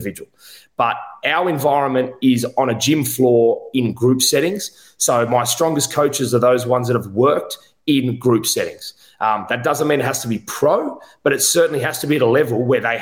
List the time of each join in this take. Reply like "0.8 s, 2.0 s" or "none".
none